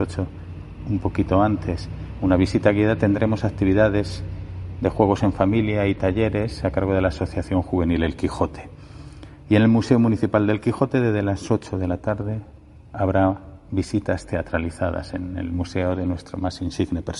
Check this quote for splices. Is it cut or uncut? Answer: uncut